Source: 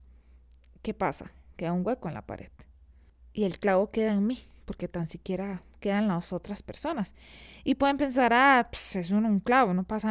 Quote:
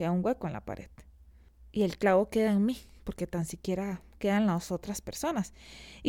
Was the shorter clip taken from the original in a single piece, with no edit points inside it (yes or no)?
yes